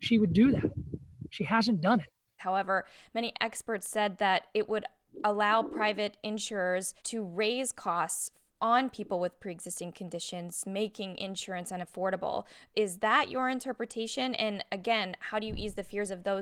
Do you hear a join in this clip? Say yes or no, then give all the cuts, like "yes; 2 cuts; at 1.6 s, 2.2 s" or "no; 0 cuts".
yes; 2 cuts; at 2.4 s, 7.0 s